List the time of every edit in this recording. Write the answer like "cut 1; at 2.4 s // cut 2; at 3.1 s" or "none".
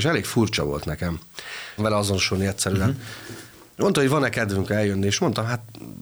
cut 1; at 1.8 s